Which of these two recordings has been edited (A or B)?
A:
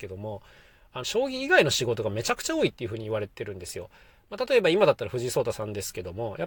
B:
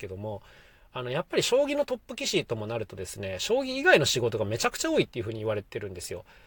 A